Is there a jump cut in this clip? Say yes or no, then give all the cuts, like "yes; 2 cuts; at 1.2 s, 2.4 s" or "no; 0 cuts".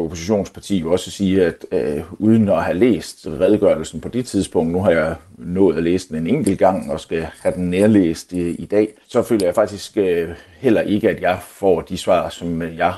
no; 0 cuts